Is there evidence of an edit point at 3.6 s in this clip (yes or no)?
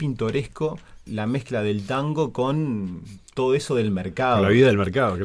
no